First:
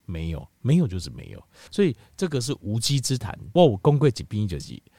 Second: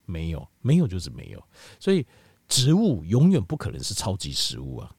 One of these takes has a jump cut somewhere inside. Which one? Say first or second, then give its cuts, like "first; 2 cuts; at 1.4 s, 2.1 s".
first; 2 cuts; at 1.7 s, 3.6 s